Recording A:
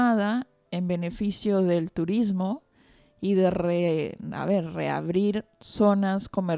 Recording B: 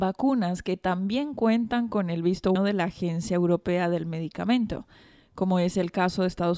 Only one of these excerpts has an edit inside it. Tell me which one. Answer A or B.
B